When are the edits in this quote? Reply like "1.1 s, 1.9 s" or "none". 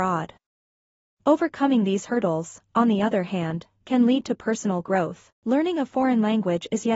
5.3 s